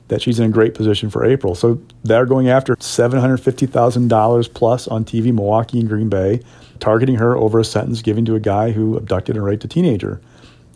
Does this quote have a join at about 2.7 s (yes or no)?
yes